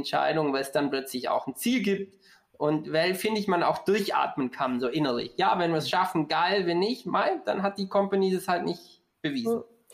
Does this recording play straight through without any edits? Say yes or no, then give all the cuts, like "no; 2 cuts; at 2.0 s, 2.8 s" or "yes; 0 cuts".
yes; 0 cuts